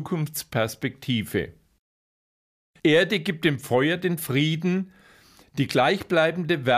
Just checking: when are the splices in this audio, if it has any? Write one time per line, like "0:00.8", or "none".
0:02.8

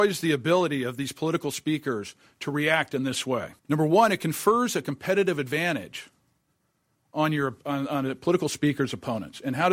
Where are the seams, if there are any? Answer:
0:03.6

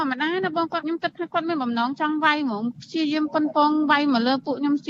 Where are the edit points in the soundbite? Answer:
none

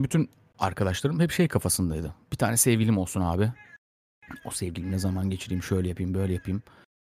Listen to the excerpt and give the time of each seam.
none

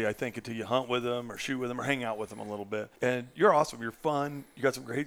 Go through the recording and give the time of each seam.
0:03.0

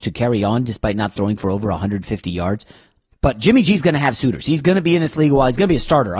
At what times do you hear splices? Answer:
0:03.1

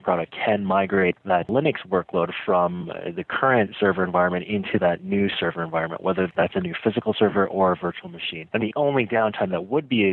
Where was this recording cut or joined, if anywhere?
0:08.6

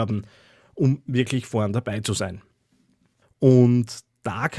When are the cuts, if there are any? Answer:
0:03.2

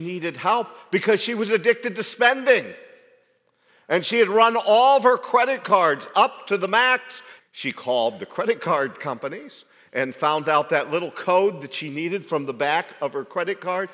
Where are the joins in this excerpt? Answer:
0:07.4

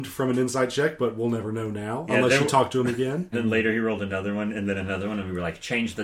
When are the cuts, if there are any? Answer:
0:03.3

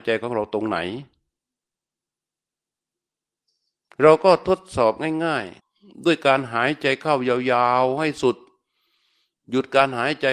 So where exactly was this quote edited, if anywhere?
0:05.6

